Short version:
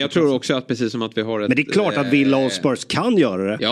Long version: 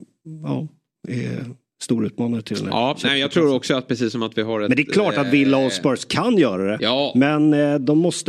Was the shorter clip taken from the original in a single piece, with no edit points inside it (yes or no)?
yes